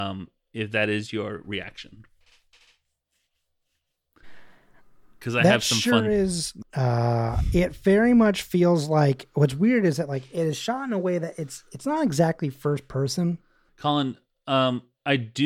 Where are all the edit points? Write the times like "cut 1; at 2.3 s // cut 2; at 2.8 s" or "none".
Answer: cut 1; at 6.6 s // cut 2; at 13.7 s